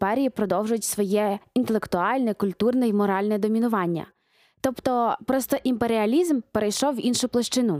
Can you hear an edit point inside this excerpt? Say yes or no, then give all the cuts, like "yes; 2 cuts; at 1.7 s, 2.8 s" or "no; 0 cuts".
no; 0 cuts